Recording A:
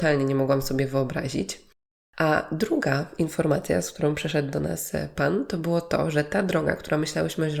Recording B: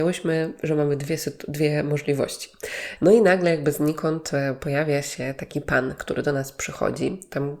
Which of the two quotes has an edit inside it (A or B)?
B